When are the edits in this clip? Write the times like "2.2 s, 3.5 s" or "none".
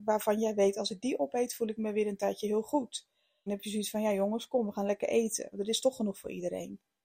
3.5 s